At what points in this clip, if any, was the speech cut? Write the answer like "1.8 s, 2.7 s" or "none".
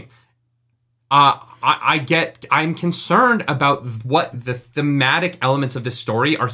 1.0 s, 4.3 s